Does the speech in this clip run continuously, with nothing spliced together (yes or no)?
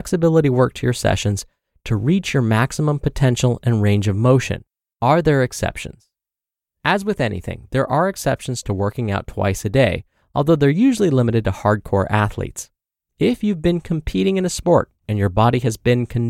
no